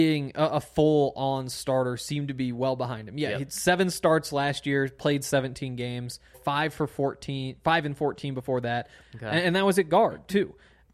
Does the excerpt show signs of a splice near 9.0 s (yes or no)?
yes